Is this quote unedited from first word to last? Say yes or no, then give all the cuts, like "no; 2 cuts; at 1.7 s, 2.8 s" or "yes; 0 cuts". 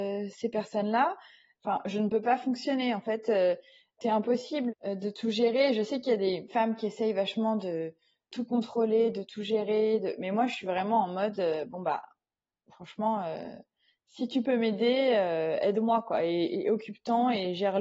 yes; 0 cuts